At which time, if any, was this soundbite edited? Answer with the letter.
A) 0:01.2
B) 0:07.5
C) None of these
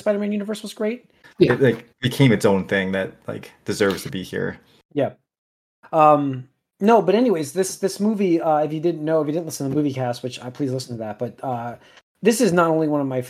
A